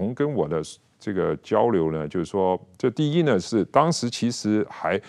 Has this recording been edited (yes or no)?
no